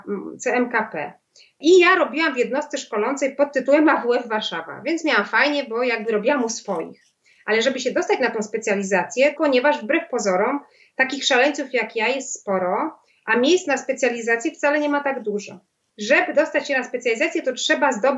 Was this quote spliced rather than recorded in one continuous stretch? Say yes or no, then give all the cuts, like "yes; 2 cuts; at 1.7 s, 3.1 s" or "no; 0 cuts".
yes; 1 cut; at 9.4 s